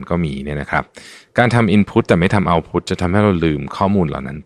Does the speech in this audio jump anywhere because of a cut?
no; 0 cuts

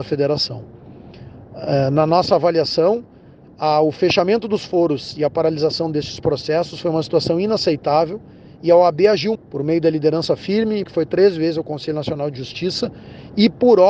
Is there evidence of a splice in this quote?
yes; 2 cuts; at 9.3 s, 10.8 s

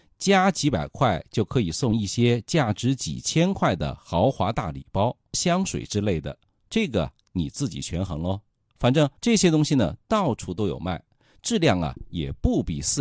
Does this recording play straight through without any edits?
no; 2 cuts; at 5.3 s, 9.2 s

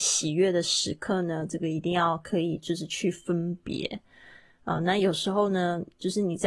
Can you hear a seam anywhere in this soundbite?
no; 0 cuts

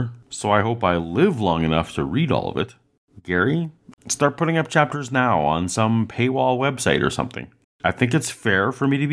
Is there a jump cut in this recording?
yes; 2 cuts; at 3.9 s, 7.6 s

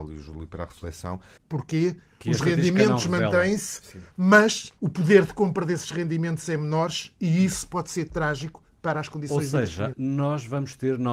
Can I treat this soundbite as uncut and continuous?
no; 3 cuts; at 1.4 s, 4.8 s, 9.9 s

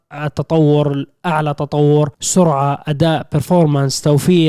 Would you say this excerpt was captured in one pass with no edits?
no; 1 cut; at 2.1 s

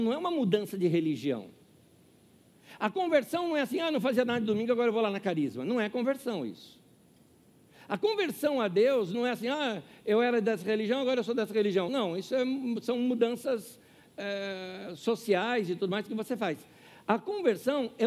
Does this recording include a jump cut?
no; 0 cuts

